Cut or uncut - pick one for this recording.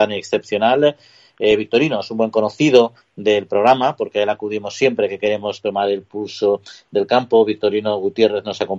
uncut